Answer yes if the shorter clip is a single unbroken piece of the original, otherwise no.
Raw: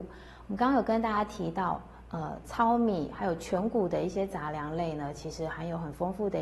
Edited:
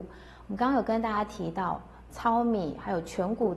no